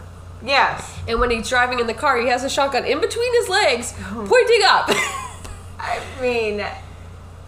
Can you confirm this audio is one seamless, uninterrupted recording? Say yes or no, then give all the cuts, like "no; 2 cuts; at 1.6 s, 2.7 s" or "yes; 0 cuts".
yes; 0 cuts